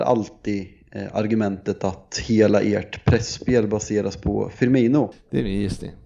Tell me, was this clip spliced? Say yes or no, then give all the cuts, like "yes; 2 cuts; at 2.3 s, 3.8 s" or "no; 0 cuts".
yes; 1 cut; at 5.1 s